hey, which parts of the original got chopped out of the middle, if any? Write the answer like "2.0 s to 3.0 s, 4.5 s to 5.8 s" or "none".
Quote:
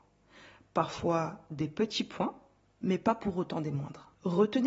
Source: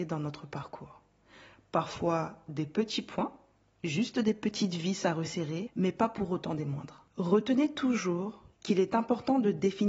3.8 s to 5.7 s